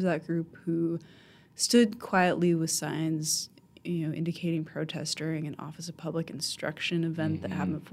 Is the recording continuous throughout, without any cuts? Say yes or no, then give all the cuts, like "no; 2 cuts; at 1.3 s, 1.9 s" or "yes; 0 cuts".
yes; 0 cuts